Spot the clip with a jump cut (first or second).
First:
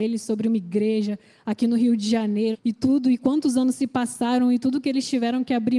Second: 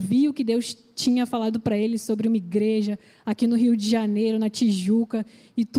first